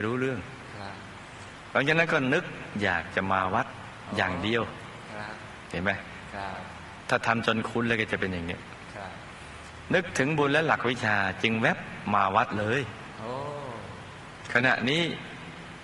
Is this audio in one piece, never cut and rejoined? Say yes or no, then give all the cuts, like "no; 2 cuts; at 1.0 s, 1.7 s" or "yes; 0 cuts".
yes; 0 cuts